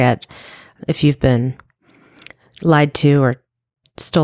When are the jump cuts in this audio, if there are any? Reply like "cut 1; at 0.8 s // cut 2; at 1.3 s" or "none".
none